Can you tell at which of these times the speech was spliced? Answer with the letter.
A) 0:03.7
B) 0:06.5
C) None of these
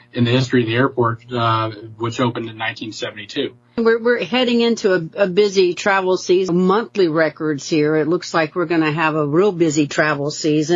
B